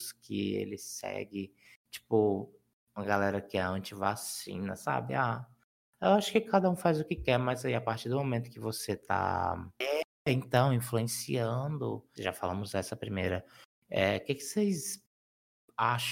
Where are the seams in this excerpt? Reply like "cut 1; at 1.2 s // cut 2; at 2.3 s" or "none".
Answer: cut 1; at 9.8 s // cut 2; at 12.2 s